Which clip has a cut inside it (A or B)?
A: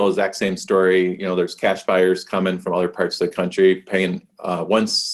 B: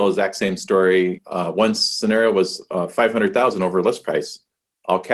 B